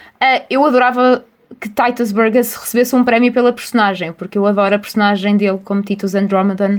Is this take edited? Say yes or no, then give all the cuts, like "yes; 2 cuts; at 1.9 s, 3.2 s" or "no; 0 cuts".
no; 0 cuts